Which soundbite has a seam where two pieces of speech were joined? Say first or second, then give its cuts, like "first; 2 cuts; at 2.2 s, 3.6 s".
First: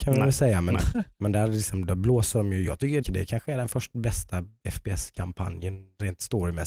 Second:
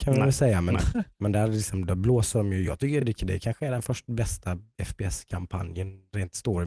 first; 1 cut; at 3.0 s